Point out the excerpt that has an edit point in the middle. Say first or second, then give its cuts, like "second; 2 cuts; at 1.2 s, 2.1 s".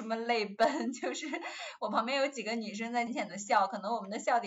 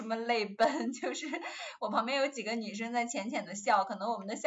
first; 1 cut; at 3.1 s